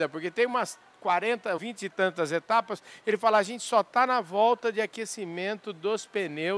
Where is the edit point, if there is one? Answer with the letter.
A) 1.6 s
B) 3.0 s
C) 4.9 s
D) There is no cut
A